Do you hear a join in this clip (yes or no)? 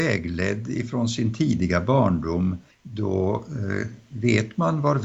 yes